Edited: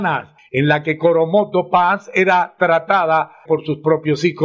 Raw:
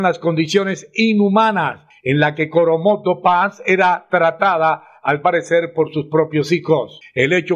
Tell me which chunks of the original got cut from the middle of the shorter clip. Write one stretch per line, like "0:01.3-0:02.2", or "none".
0:05.0-0:05.7